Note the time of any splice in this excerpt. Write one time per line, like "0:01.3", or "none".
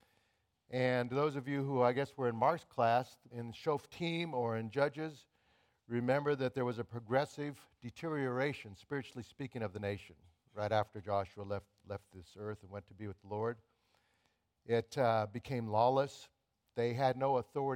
0:03.3